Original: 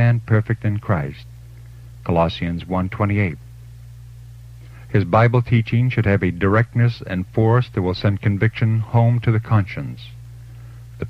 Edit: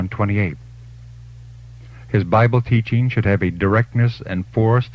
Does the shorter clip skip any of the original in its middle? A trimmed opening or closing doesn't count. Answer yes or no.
no